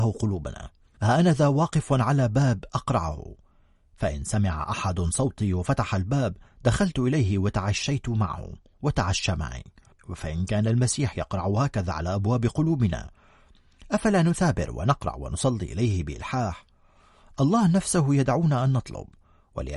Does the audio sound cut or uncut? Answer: uncut